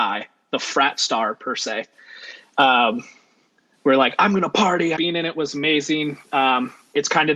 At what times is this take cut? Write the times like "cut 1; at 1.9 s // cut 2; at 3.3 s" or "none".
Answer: cut 1; at 5.0 s